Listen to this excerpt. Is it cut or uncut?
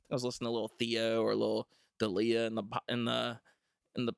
uncut